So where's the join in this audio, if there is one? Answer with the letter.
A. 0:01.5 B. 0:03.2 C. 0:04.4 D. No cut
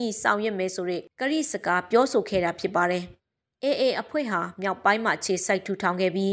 B